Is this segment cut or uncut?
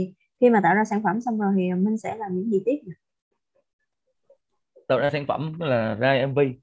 uncut